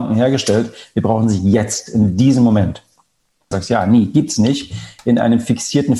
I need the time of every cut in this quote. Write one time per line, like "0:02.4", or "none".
0:03.5